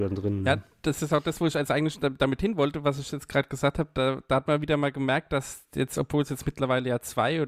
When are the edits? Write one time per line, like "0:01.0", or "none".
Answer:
none